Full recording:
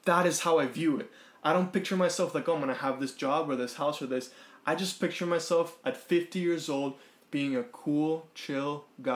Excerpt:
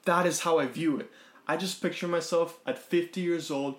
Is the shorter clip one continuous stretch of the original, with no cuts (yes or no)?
no